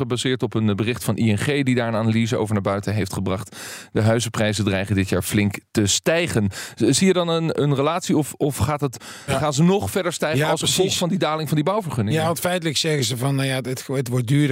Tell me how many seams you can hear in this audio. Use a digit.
2